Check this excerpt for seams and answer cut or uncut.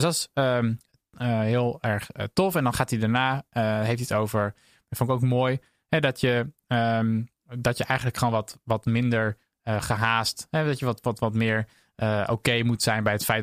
uncut